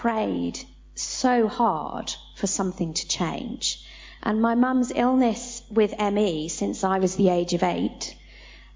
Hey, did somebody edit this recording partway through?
yes; 1 cut; at 4.2 s

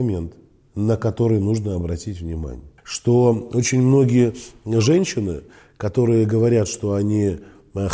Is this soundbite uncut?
no; 1 cut; at 2.8 s

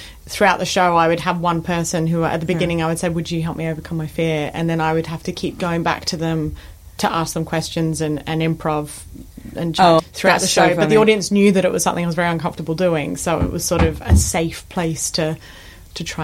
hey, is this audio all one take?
no; 1 cut; at 10.0 s

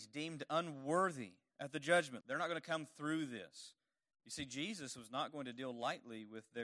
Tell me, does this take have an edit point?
yes; 2 cuts; at 2.2 s, 4.1 s

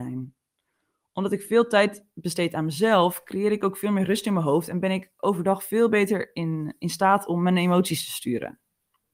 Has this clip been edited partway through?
no; 0 cuts

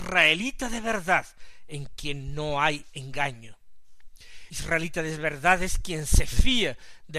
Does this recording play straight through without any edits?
no; 1 cut; at 4.5 s

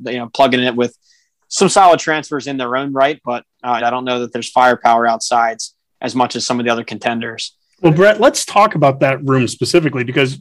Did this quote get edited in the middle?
yes; 1 cut; at 3.8 s

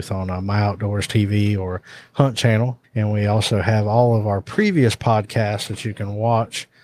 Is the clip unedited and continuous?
no; 1 cut; at 2.8 s

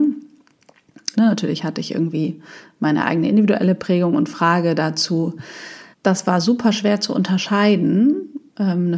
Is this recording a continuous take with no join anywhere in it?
no; 2 cuts; at 1.1 s, 5.9 s

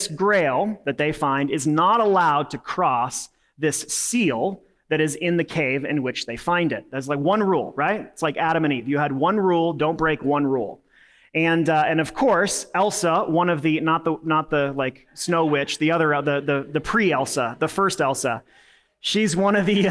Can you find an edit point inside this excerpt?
no; 0 cuts

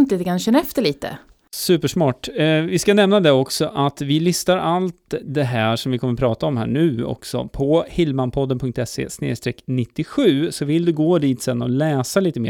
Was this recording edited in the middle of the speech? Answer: no; 0 cuts

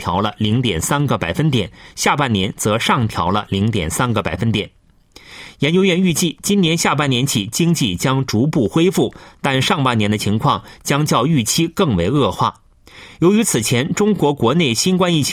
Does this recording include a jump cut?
no; 0 cuts

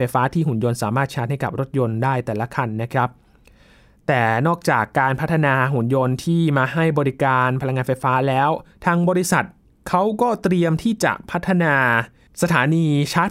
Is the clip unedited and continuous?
yes; 0 cuts

